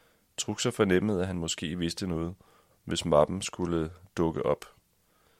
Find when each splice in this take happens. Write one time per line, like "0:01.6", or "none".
0:02.7